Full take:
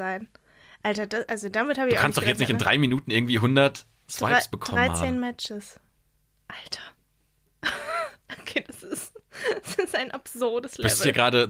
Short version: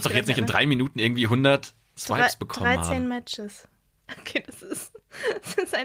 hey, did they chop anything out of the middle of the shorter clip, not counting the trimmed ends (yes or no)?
yes